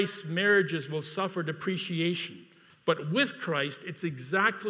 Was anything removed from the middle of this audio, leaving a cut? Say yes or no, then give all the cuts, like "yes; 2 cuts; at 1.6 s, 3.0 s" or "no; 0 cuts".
yes; 1 cut; at 2.7 s